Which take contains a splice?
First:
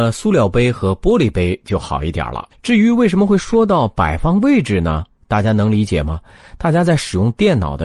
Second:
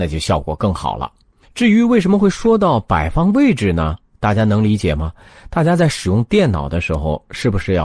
first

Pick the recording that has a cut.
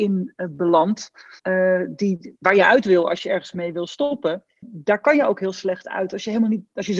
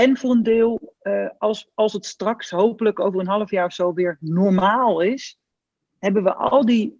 first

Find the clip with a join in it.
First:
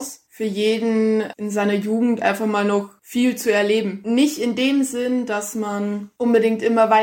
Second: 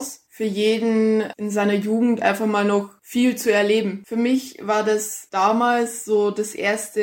second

